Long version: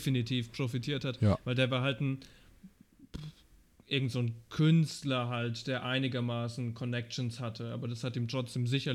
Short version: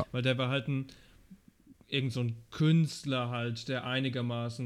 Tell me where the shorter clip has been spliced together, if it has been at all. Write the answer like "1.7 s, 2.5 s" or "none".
1.7 s